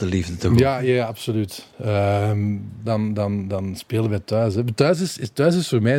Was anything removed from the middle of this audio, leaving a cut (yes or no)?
yes